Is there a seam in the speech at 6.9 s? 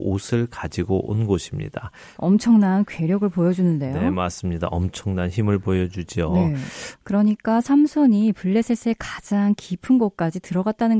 yes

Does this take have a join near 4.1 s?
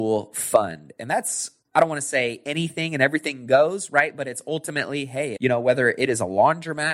no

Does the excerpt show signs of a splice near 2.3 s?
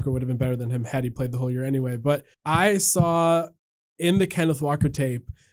yes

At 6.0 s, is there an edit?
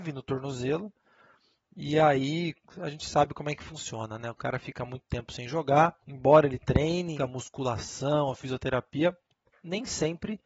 yes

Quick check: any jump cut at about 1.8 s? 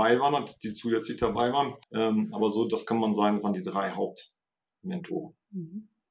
yes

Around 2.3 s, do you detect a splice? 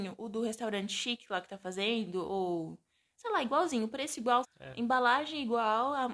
no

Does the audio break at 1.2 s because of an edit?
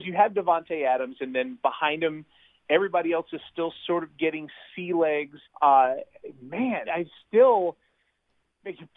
no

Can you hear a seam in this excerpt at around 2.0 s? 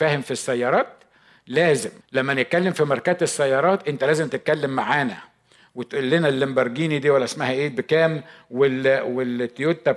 yes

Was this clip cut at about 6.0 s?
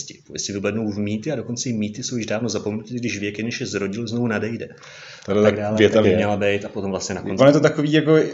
yes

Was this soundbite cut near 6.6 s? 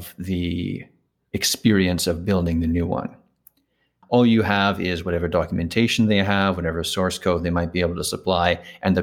no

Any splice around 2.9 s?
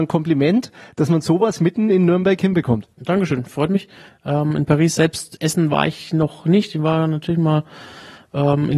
yes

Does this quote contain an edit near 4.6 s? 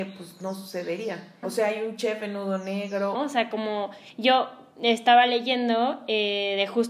no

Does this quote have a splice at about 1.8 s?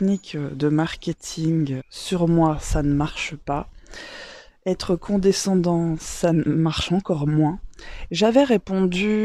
yes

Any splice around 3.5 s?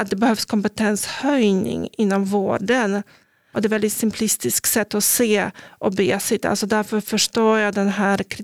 yes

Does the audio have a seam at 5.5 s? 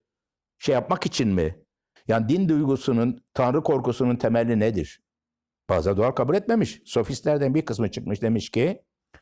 yes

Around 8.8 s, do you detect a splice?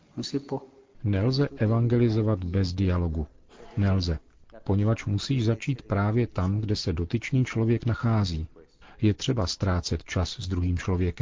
yes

